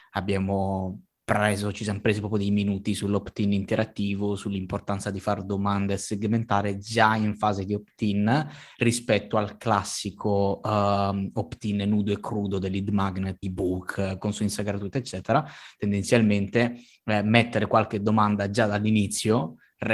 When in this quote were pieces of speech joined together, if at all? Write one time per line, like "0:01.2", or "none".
0:13.4